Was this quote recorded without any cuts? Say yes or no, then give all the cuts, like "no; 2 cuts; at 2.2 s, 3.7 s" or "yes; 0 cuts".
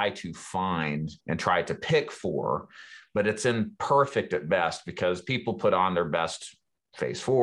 no; 1 cut; at 1.2 s